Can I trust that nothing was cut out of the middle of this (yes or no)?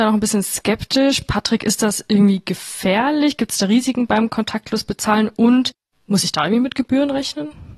yes